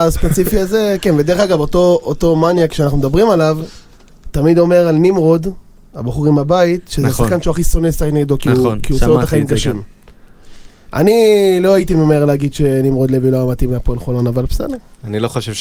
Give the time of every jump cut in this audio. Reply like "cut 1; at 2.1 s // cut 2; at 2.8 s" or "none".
none